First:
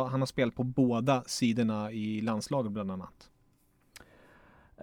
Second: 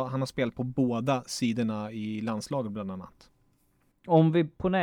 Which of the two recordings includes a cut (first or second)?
second